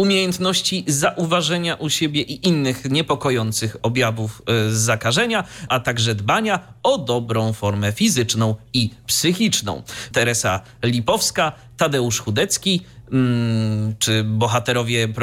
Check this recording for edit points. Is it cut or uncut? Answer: cut